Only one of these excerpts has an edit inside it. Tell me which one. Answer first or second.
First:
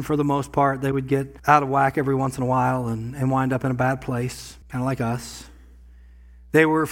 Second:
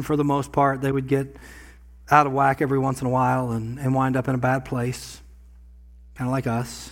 first